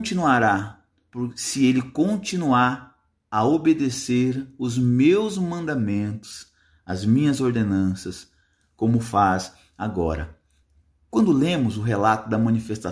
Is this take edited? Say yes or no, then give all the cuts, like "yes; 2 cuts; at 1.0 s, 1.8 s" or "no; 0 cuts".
no; 0 cuts